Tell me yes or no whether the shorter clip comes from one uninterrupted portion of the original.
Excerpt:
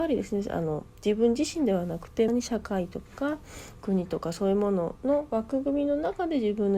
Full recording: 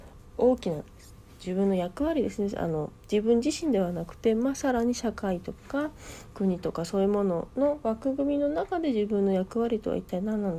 no